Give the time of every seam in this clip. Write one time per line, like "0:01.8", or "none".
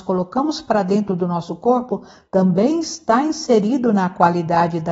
0:02.3